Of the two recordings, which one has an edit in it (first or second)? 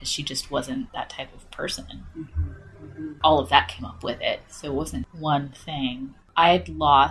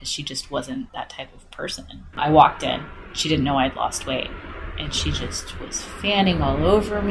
second